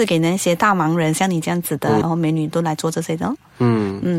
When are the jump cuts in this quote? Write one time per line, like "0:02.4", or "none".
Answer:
0:02.0